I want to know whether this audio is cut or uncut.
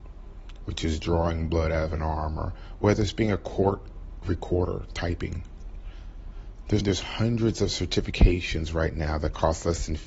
cut